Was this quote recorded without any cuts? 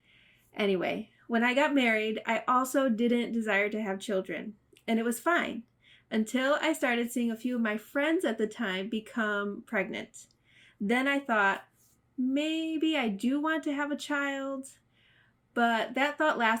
yes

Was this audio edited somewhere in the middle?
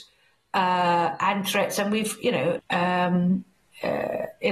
yes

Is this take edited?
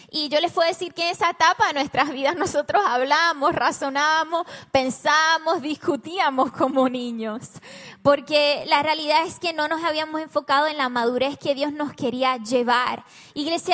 no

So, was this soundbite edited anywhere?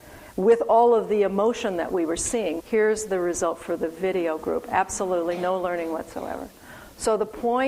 yes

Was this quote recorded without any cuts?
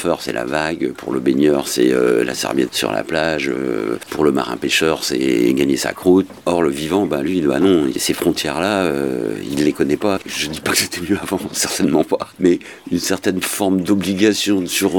yes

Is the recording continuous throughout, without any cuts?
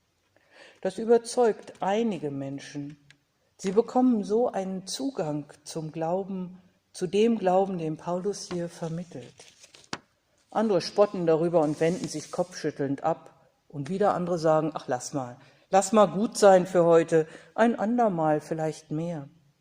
yes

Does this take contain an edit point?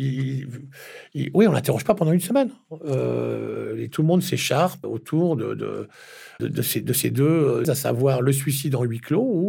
yes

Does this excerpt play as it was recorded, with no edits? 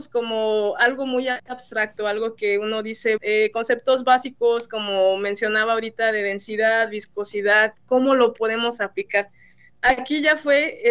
no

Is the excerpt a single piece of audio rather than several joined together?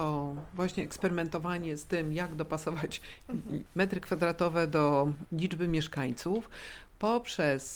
yes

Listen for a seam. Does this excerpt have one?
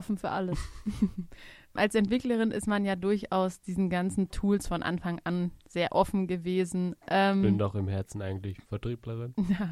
yes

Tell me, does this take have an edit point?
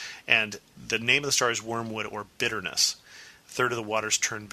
no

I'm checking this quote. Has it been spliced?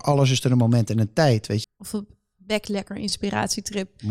yes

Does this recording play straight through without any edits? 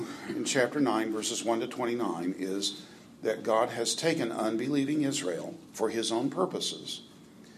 yes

